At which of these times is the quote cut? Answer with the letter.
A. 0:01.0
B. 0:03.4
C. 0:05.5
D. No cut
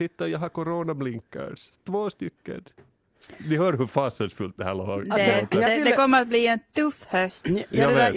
D